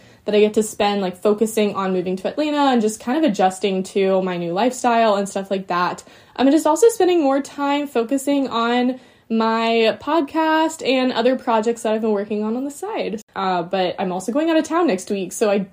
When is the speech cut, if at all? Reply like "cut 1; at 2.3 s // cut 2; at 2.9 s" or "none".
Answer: cut 1; at 13.3 s